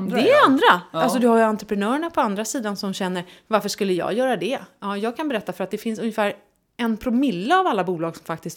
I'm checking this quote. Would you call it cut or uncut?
uncut